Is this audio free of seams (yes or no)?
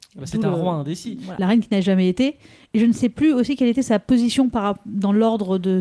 no